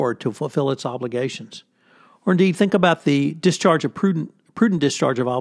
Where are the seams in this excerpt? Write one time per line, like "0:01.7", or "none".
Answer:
none